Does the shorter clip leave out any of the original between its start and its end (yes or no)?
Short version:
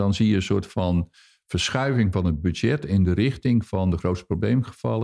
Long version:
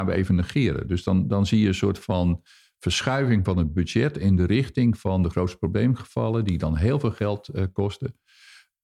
no